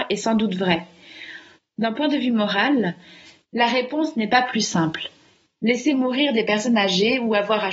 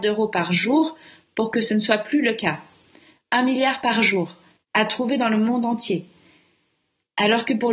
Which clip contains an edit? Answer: first; 1 cut; at 1.6 s

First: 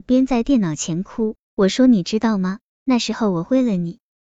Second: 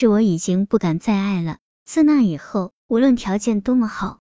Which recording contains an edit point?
second; 1 cut; at 2.8 s

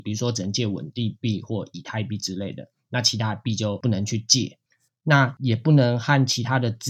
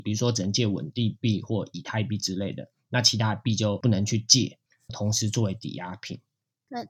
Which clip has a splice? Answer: second; 1 cut; at 4.9 s

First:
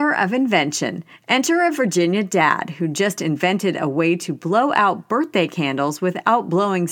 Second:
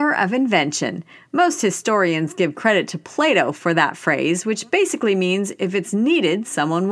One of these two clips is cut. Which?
first; 1 cut; at 1.1 s

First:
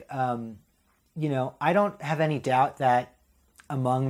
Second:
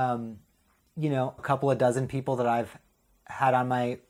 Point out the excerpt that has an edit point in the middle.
second; 1 cut; at 1.4 s

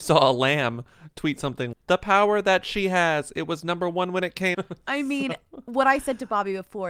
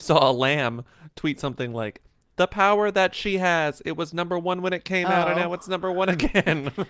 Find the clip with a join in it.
first; 2 cuts; at 1.7 s, 4.5 s

